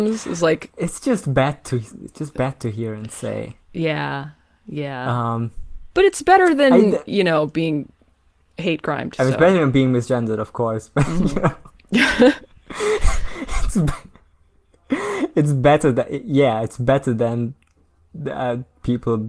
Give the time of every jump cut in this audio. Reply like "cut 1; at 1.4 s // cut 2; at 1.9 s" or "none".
cut 1; at 5.9 s